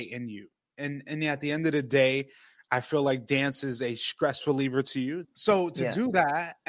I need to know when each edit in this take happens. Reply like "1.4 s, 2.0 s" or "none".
5.2 s